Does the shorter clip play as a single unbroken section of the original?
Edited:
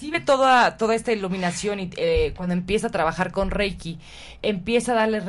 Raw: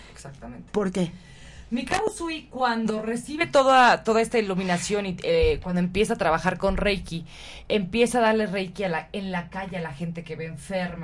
yes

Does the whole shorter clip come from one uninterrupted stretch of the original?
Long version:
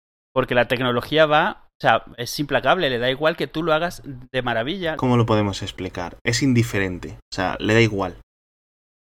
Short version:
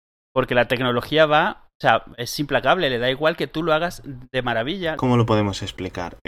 yes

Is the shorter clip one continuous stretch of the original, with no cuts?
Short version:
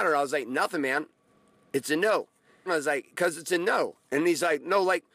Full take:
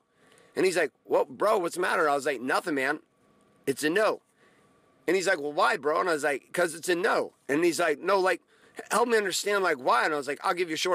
no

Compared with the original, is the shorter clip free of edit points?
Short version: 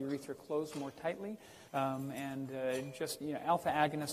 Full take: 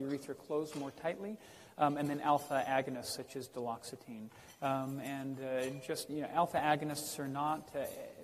no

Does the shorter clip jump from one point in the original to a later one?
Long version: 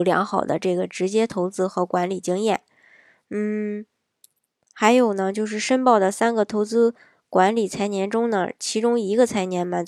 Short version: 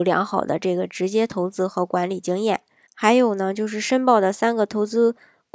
yes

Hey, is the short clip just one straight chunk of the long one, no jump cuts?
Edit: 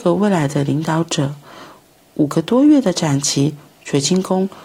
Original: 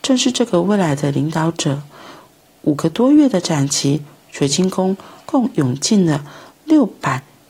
yes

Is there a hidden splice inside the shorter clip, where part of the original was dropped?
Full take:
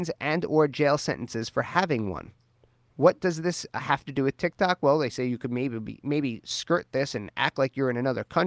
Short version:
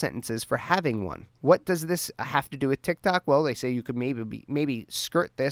yes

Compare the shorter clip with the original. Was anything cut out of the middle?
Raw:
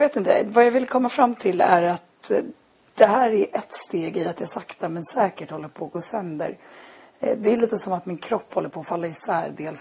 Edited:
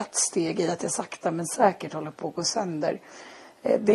no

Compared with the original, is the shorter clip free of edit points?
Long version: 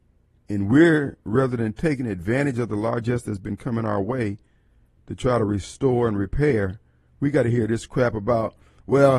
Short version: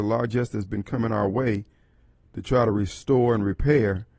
yes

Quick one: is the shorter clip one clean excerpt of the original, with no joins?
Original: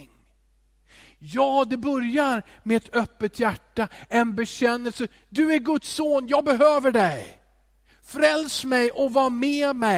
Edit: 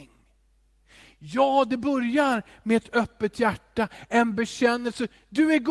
yes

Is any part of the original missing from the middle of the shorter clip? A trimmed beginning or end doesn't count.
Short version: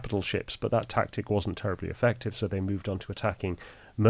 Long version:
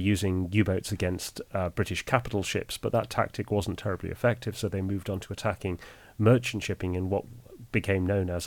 no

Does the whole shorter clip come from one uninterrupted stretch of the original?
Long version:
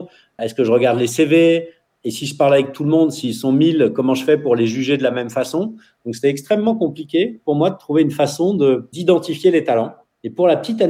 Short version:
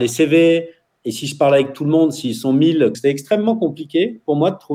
no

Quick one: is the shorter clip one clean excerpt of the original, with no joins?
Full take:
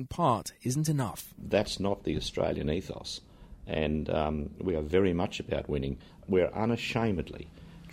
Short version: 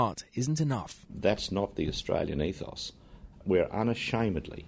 no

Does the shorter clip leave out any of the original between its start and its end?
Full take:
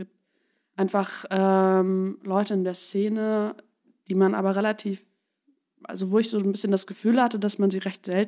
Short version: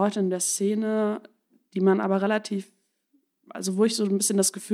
no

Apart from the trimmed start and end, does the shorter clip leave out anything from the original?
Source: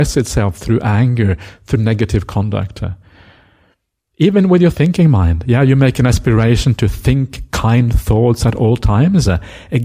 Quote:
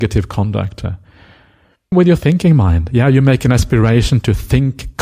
yes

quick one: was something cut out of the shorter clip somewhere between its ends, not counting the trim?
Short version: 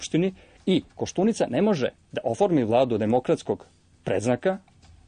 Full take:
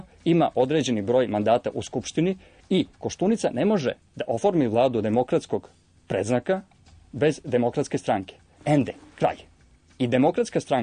no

